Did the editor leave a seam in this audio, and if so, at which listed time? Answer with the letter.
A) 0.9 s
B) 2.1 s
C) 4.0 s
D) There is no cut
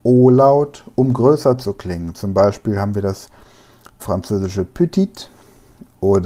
C